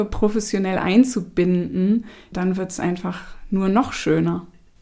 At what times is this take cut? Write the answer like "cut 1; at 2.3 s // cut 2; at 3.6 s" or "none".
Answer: cut 1; at 2.3 s